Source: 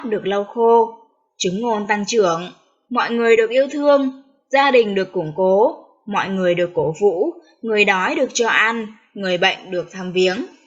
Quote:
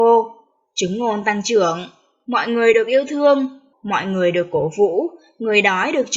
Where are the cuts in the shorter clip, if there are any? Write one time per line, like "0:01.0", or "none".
0:03.7